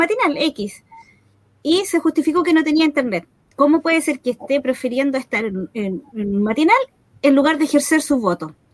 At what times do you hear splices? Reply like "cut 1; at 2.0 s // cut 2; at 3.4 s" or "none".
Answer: cut 1; at 3.5 s